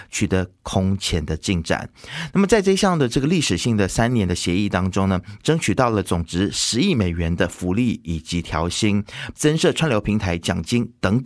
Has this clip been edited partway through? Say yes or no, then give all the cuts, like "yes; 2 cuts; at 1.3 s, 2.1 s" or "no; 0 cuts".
yes; 2 cuts; at 5.4 s, 9.3 s